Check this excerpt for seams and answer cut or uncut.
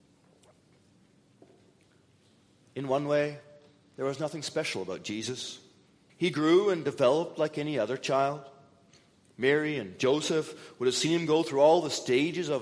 cut